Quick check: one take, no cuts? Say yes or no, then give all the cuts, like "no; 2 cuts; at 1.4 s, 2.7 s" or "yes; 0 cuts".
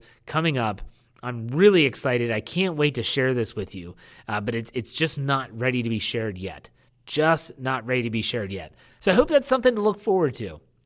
yes; 0 cuts